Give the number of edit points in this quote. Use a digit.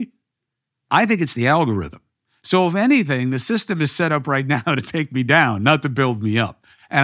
0